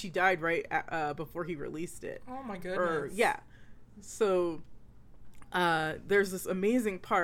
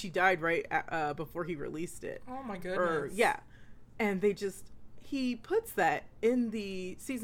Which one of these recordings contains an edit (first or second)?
second